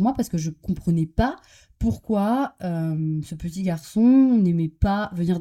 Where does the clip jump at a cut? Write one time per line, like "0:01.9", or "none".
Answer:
none